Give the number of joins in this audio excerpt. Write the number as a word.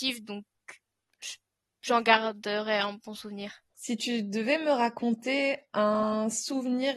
one